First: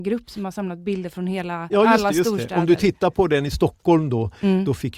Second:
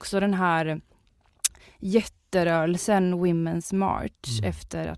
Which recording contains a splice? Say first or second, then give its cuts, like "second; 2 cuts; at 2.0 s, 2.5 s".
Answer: first; 1 cut; at 1.7 s